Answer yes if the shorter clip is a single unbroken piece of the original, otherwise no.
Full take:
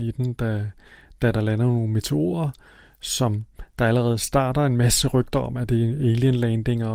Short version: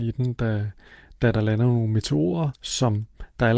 no